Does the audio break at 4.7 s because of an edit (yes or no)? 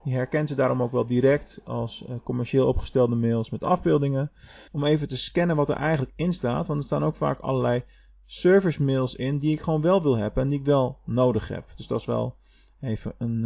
yes